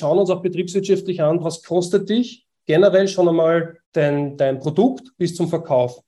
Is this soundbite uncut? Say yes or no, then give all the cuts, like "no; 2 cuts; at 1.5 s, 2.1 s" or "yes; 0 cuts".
no; 2 cuts; at 1.4 s, 3.8 s